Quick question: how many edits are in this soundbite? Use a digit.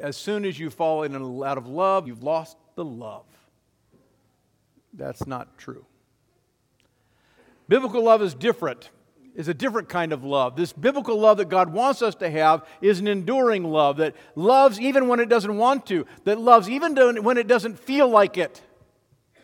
1